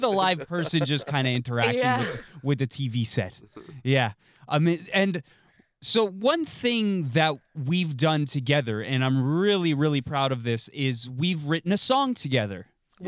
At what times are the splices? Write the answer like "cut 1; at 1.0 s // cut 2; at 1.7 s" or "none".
none